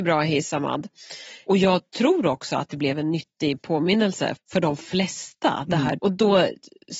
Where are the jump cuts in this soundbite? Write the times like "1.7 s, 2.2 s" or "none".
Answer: 4.4 s, 6.0 s